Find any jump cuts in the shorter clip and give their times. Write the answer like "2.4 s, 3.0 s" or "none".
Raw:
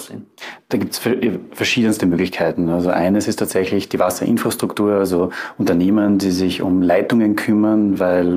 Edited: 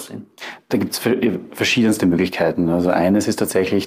none